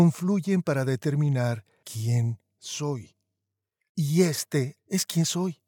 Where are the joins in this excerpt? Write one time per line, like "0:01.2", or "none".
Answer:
0:04.8